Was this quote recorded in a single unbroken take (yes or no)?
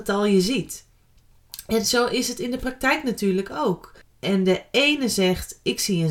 no